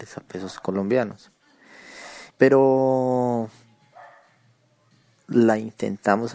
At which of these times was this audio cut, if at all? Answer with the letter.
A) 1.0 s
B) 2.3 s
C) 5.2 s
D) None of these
B